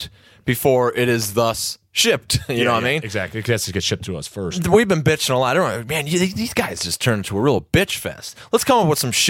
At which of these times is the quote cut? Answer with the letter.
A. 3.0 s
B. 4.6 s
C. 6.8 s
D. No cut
D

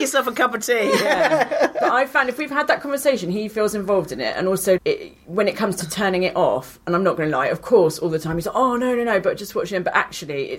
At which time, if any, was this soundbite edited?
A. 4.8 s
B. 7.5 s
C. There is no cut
A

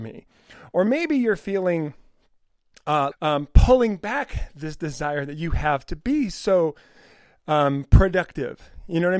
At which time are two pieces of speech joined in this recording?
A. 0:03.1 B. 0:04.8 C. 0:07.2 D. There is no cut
A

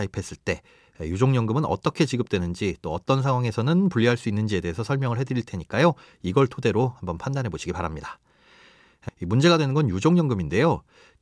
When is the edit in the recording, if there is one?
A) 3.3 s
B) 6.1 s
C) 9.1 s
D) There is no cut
C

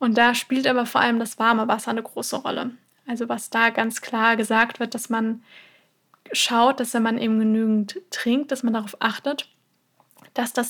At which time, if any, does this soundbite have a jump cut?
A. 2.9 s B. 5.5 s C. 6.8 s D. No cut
D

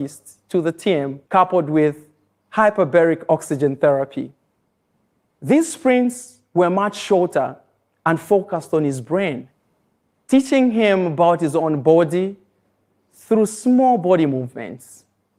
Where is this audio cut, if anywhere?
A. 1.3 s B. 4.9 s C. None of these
A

